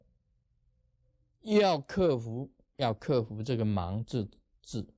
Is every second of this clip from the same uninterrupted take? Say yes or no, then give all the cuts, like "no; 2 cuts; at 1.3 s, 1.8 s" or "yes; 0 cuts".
yes; 0 cuts